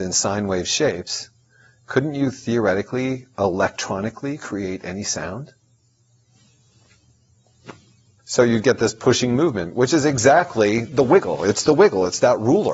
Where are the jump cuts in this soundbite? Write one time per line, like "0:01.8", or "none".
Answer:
0:08.2